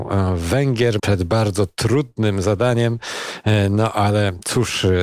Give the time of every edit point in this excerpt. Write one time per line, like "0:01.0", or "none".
0:01.0